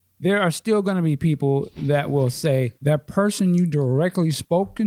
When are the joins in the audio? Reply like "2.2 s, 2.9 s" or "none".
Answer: 2.8 s